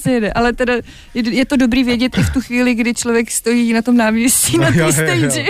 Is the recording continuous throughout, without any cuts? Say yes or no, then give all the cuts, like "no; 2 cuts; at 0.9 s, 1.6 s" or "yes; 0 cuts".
yes; 0 cuts